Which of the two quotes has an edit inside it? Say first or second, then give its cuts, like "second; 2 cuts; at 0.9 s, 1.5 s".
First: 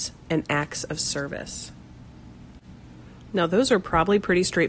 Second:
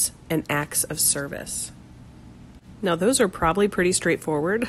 second; 1 cut; at 2.8 s